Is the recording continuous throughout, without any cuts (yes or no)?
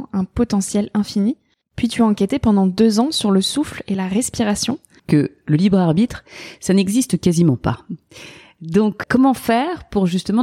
no